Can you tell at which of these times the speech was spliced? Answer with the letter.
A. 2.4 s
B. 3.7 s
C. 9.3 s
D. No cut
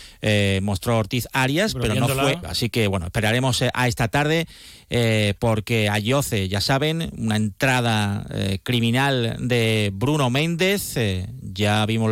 A